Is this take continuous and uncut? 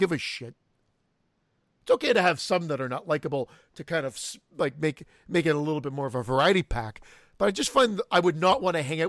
yes; 0 cuts

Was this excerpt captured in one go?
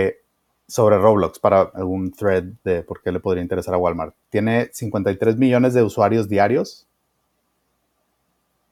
no; 1 cut; at 1.7 s

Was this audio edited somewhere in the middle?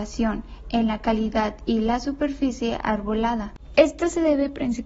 no; 0 cuts

